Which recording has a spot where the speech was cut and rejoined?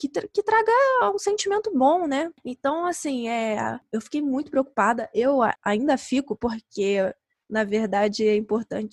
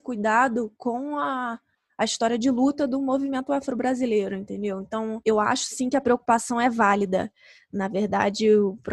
first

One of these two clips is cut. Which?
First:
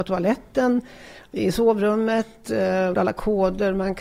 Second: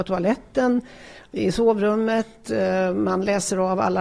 first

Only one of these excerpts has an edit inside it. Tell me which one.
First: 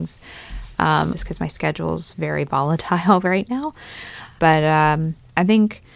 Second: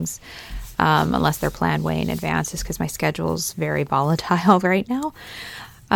first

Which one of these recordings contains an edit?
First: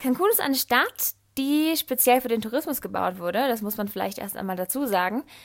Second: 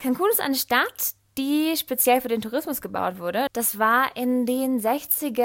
second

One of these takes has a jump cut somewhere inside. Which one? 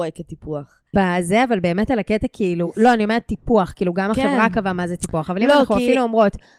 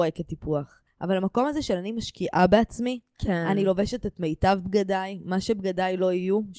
first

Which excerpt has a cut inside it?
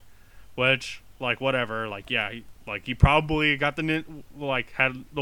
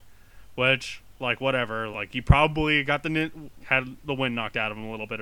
second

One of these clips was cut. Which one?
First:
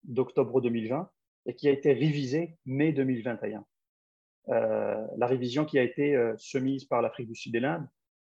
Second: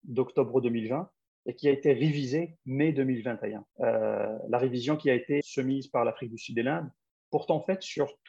second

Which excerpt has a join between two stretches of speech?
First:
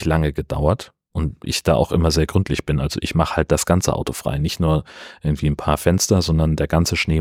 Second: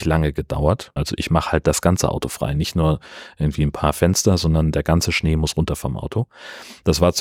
second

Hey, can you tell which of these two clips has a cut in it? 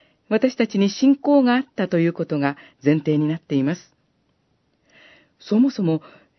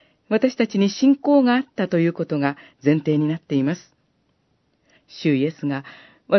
second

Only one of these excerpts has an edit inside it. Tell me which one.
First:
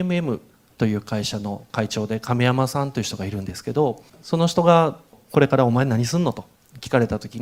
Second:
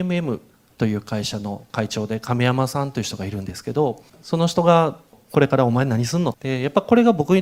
second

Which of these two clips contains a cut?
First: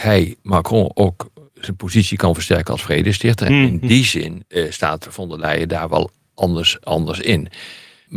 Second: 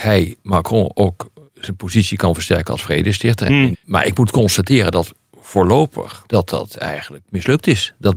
second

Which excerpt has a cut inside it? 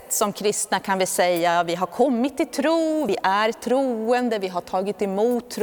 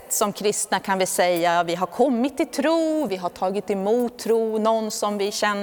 second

